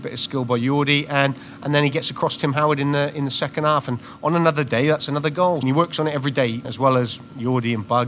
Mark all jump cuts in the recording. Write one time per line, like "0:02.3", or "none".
0:05.6
0:06.6